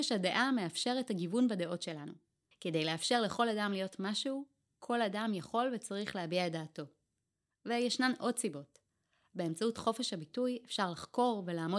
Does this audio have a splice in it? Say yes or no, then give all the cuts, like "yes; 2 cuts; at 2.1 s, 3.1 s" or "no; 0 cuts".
yes; 1 cut; at 2.5 s